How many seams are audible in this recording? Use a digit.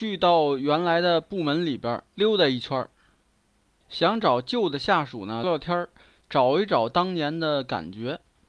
1